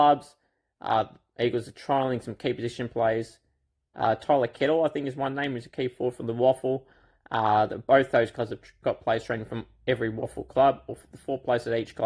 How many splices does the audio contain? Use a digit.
0